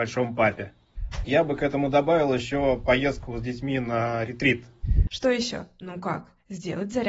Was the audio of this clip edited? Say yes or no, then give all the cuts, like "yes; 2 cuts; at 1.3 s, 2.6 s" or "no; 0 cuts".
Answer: yes; 2 cuts; at 1.2 s, 5.1 s